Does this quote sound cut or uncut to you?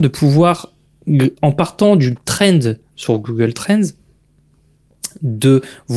uncut